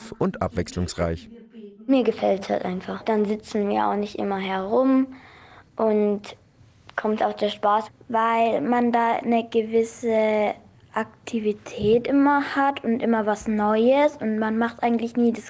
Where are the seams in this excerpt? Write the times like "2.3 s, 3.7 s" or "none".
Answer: 7.2 s